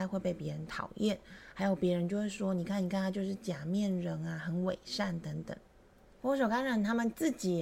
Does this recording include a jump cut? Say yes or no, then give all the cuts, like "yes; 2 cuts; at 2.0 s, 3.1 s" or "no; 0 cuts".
yes; 1 cut; at 6.1 s